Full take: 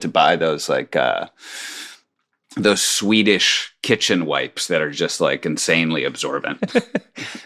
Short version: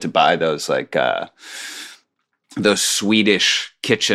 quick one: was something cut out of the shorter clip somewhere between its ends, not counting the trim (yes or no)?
no